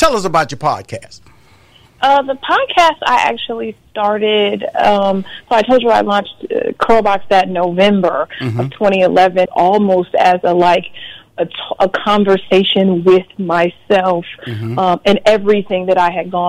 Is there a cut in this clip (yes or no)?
yes